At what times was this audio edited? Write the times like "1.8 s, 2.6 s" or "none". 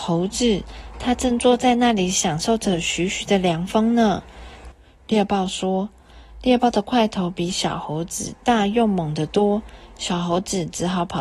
4.7 s